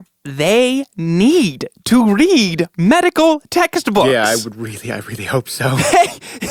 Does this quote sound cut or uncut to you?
uncut